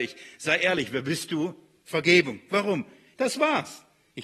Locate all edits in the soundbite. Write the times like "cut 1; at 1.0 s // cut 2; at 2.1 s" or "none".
cut 1; at 1.8 s // cut 2; at 3.1 s